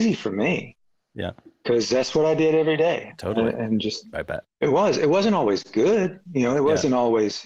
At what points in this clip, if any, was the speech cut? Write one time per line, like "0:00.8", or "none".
0:04.1